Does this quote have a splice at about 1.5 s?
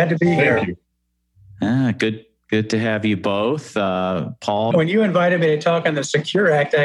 no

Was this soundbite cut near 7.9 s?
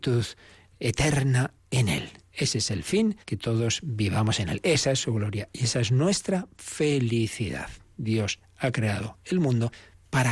no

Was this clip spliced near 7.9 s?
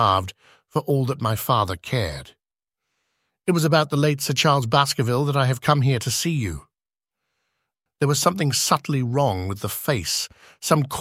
yes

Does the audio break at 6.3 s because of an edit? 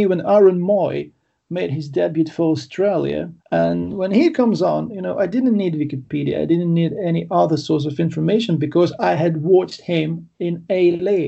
no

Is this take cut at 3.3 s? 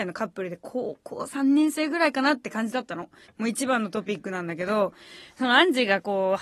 yes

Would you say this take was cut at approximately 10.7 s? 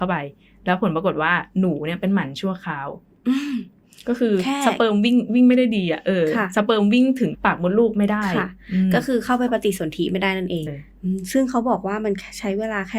yes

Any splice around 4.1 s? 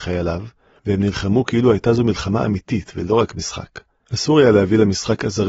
yes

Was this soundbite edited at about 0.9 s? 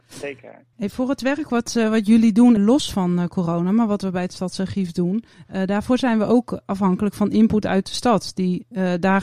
no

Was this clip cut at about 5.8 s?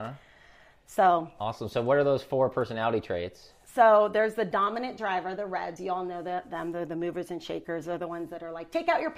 no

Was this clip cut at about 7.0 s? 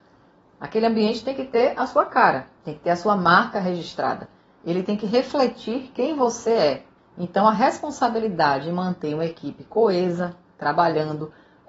yes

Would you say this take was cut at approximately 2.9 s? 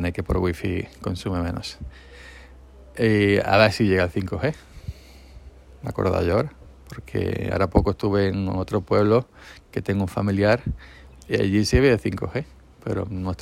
no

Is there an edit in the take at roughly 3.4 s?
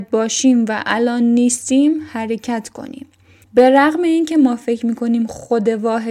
yes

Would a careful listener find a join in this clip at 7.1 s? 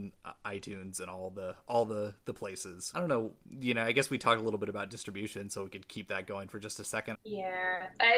yes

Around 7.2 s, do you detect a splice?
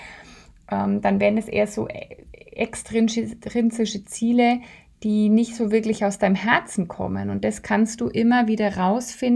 no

